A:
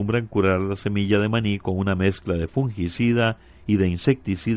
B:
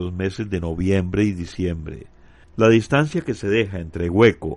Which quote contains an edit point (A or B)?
B